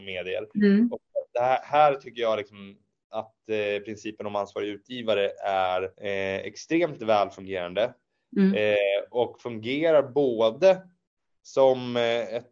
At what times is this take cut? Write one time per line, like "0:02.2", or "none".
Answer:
0:05.9

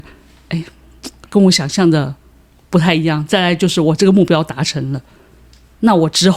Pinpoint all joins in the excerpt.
none

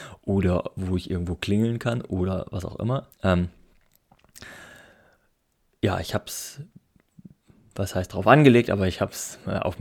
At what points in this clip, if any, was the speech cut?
0:03.1

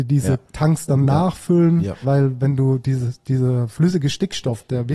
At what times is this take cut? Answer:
0:02.0

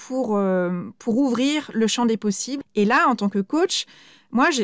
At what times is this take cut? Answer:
0:02.6

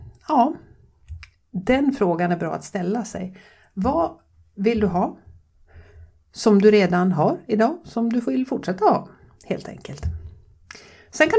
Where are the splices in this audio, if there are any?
none

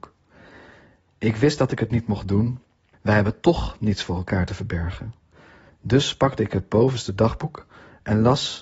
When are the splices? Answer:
0:02.9

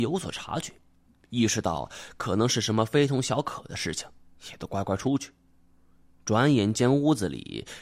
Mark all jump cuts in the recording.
none

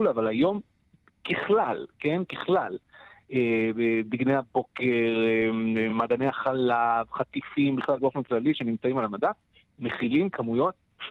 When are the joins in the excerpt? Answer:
none

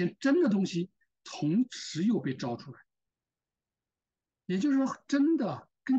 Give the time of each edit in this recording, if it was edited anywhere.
none

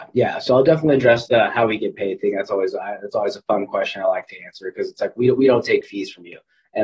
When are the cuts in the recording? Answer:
none

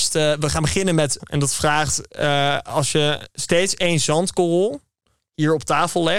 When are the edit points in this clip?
0:01.2

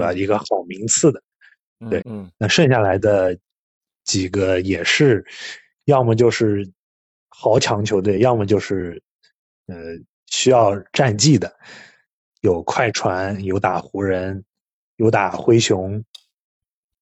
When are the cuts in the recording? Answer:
0:02.0

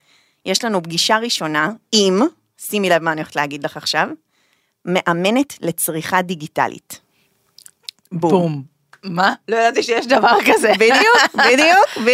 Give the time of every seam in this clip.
none

